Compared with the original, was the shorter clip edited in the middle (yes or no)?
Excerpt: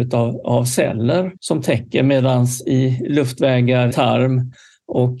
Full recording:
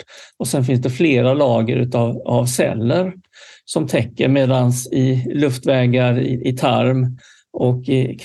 yes